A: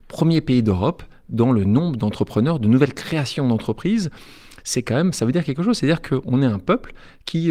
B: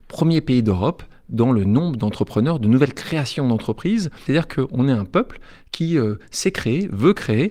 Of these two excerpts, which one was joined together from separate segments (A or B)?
B